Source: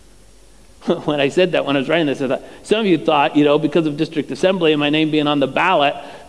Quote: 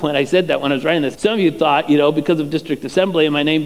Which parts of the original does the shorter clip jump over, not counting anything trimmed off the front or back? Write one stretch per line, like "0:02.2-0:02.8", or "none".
0:02.2-0:02.6

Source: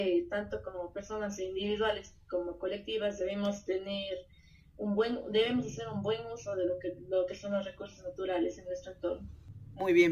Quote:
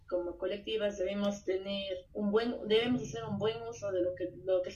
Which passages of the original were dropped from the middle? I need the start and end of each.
0:04.3-0:04.7

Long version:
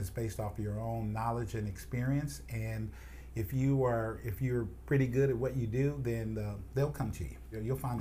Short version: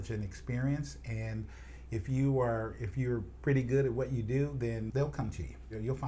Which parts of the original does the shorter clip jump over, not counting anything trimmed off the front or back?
0:06.3-0:06.7

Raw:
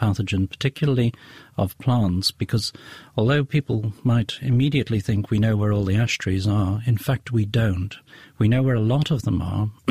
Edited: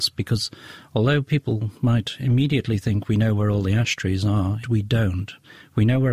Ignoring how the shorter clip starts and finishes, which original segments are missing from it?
0:06.8-0:07.2

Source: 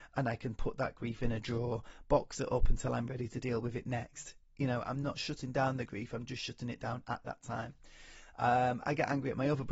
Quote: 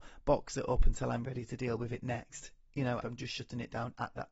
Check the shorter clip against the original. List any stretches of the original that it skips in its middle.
0:04.8-0:06.1

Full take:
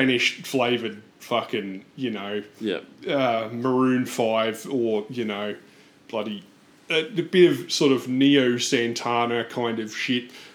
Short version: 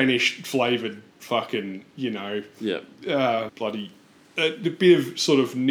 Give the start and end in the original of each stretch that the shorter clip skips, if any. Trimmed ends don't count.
0:03.5-0:06.0

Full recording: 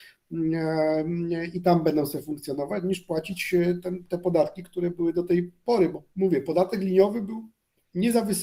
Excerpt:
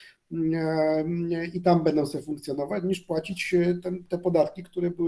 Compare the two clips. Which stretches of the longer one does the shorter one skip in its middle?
none

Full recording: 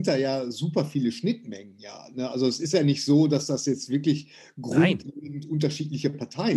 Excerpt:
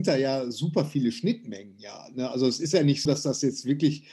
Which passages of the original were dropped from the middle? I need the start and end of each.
0:03.1-0:03.3

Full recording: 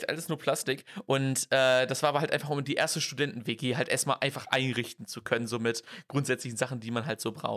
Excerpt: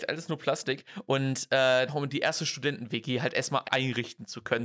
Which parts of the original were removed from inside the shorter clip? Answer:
0:01.9-0:02.4
0:04.2-0:04.4

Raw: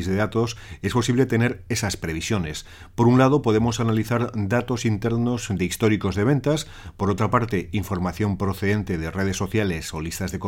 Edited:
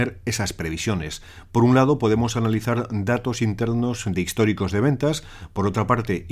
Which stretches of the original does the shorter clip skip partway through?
none

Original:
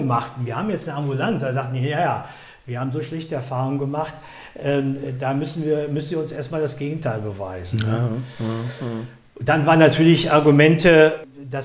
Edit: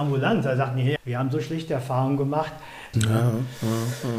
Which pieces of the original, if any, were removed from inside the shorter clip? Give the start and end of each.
0:01.9-0:02.6
0:04.5-0:07.7

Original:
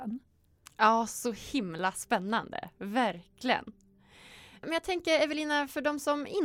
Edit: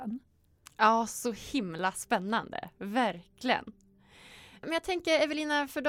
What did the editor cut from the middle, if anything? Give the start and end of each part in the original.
none

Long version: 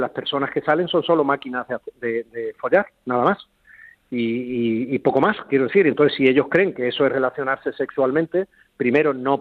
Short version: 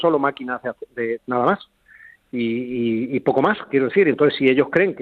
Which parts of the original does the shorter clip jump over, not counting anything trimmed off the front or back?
0:02.2-0:03.0

